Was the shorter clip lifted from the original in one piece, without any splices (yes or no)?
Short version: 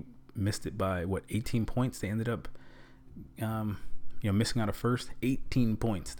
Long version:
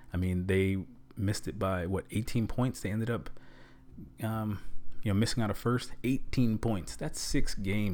yes